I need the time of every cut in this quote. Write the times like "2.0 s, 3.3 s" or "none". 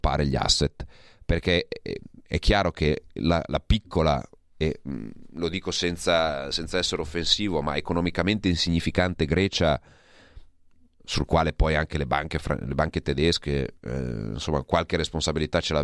none